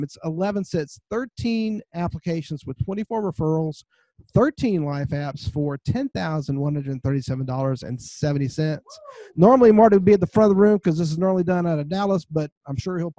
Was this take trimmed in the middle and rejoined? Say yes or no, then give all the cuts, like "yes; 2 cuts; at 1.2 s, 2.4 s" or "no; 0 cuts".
no; 0 cuts